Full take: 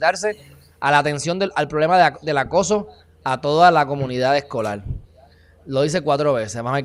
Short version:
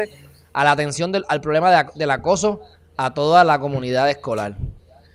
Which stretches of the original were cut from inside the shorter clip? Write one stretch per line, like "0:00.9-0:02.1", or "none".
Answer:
none